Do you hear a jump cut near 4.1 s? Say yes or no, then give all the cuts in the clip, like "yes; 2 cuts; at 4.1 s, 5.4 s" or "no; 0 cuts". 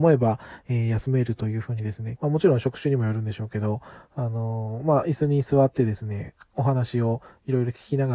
no; 1 cut; at 2.2 s